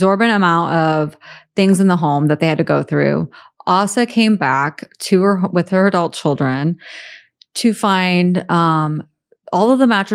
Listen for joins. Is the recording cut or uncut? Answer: uncut